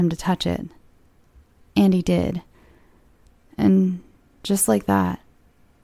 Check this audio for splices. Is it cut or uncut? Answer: uncut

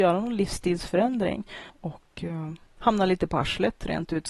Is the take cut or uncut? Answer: cut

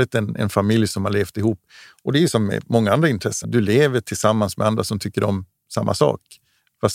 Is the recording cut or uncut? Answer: cut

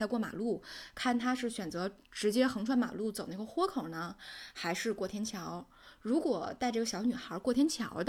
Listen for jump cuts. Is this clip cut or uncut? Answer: uncut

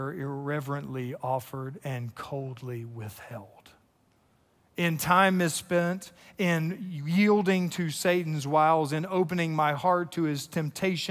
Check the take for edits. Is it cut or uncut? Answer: uncut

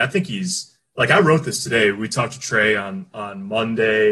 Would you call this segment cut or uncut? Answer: uncut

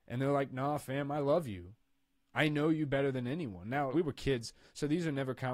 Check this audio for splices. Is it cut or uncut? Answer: cut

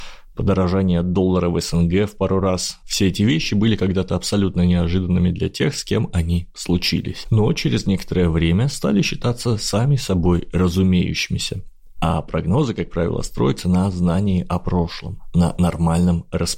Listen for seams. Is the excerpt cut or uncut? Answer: cut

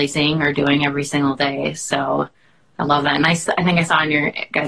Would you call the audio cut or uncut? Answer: uncut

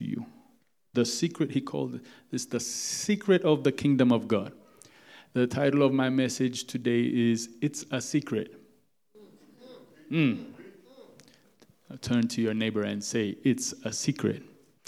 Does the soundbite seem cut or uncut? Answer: uncut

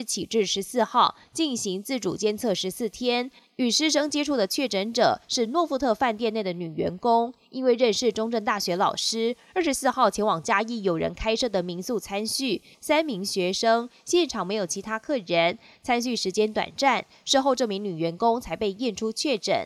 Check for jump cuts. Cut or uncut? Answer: cut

